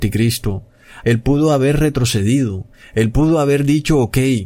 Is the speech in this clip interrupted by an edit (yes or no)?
yes